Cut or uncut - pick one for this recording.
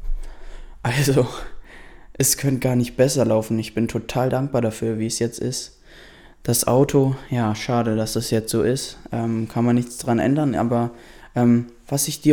uncut